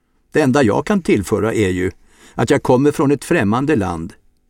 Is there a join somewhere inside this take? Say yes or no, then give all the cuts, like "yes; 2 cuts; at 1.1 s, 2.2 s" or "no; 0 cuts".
no; 0 cuts